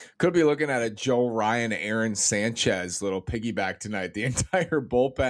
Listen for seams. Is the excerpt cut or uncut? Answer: uncut